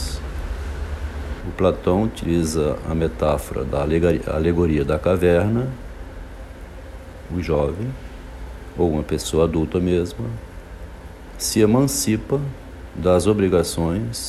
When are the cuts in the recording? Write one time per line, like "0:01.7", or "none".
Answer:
0:01.4
0:07.3